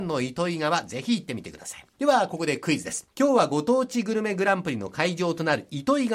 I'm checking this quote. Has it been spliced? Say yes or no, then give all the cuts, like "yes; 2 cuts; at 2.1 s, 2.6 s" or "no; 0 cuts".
yes; 2 cuts; at 1.9 s, 3.1 s